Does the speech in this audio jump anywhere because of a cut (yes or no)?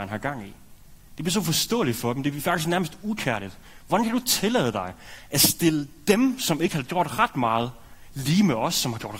no